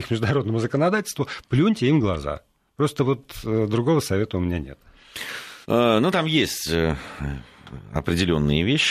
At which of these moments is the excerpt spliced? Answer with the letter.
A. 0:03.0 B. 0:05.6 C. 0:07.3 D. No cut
B